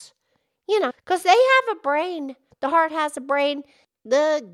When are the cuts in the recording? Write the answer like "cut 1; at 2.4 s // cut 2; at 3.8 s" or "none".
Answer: cut 1; at 0.9 s // cut 2; at 2.5 s